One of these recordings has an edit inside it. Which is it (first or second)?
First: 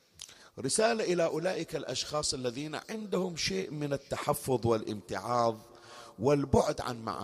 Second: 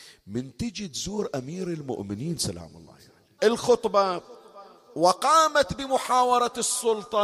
second